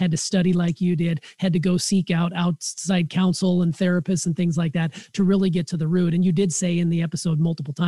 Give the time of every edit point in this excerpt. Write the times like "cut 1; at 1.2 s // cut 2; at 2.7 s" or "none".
none